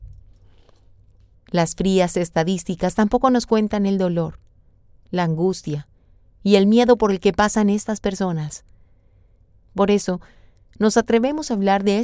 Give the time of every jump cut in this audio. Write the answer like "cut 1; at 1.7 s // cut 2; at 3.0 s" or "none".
cut 1; at 1.3 s